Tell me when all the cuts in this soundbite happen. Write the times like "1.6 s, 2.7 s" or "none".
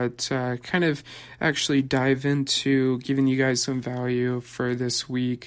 none

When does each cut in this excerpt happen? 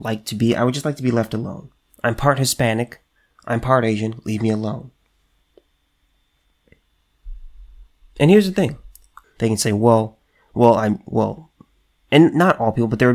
1.9 s, 9.2 s

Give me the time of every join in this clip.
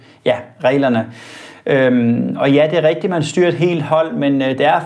none

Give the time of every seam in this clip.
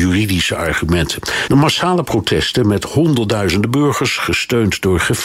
1.5 s

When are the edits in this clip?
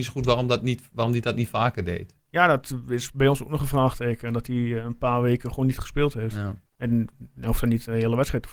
6.7 s

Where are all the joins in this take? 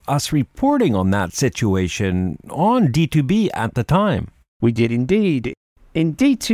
none

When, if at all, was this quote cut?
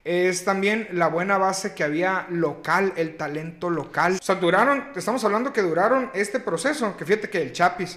4.2 s

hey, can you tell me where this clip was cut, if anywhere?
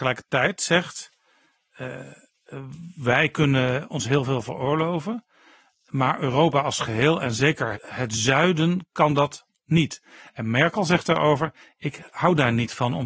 7.7 s

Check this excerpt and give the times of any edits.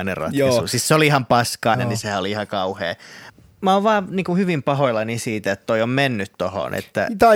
1.7 s

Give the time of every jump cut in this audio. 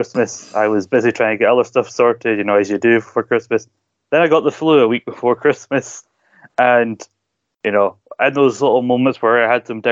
none

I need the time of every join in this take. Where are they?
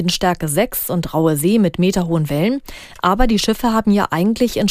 none

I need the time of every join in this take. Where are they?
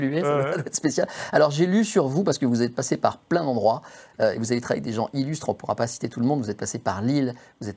none

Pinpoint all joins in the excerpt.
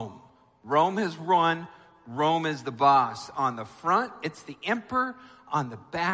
none

